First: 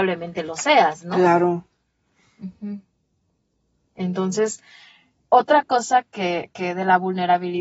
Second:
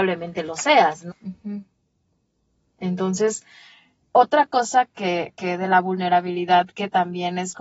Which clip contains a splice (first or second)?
second